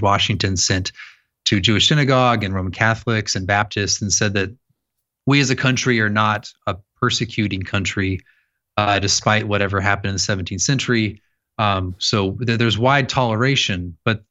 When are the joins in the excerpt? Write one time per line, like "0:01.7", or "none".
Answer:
none